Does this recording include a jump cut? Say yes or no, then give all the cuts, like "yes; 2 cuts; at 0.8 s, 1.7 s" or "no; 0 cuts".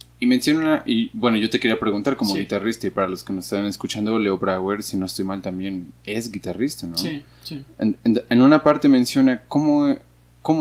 no; 0 cuts